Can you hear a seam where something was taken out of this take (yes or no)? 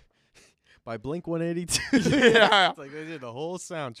no